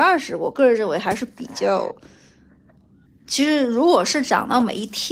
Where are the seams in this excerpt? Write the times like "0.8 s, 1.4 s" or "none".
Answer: 3.0 s